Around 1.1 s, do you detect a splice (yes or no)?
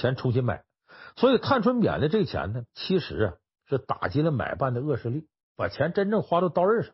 no